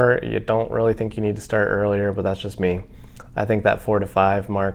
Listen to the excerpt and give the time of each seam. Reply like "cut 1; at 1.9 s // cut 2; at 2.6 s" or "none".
none